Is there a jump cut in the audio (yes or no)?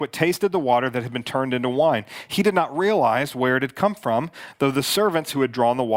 no